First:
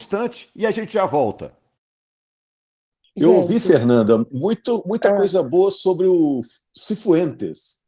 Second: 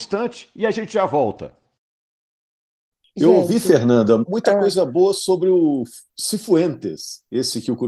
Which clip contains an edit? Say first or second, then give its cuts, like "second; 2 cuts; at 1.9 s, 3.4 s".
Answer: second; 1 cut; at 4.3 s